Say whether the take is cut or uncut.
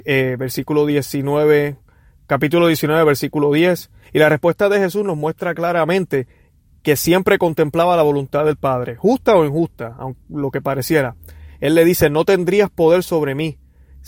uncut